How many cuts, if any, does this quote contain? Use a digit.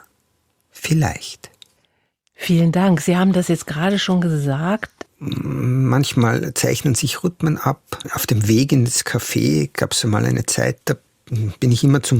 2